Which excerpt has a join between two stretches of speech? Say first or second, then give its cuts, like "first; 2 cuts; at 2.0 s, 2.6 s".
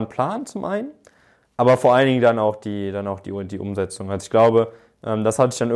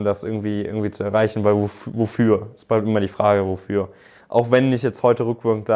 second; 1 cut; at 4.2 s